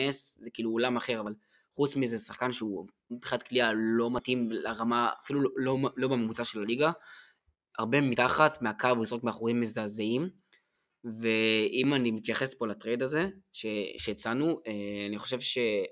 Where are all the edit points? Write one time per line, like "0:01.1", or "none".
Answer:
none